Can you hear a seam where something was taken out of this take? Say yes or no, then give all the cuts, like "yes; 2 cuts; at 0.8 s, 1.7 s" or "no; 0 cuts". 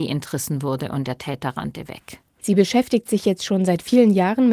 yes; 1 cut; at 2.4 s